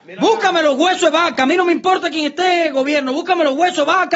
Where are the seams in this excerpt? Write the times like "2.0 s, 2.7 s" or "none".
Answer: none